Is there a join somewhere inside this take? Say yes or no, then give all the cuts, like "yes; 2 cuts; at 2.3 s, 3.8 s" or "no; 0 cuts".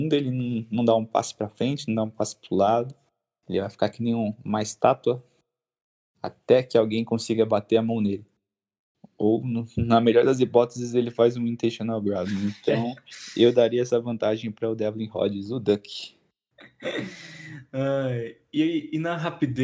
no; 0 cuts